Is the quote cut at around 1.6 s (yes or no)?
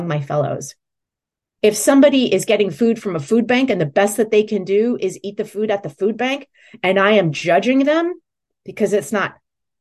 yes